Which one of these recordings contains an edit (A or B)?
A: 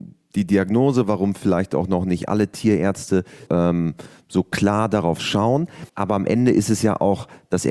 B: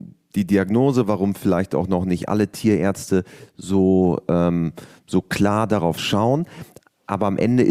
A